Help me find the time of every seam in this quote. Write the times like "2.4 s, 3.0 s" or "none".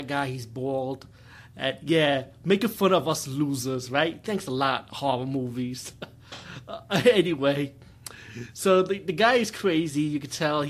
none